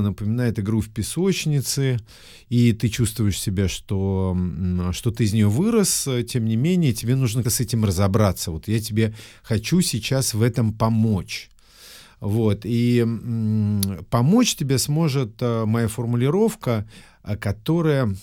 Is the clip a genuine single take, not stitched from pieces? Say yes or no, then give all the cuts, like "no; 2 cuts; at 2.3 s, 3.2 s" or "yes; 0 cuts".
no; 1 cut; at 7.4 s